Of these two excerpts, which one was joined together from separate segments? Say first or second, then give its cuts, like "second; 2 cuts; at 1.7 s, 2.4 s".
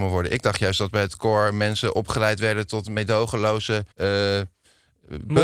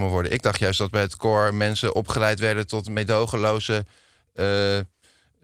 first; 1 cut; at 3.9 s